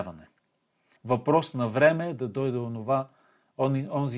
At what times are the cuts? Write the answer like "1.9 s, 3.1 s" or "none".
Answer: 1.0 s

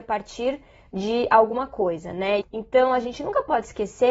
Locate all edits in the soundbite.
2.4 s

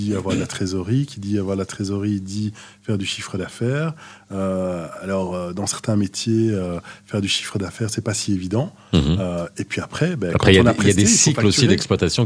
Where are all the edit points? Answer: none

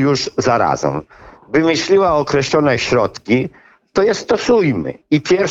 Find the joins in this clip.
none

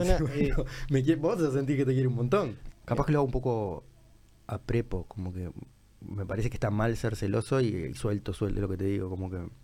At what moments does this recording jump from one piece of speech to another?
2.7 s

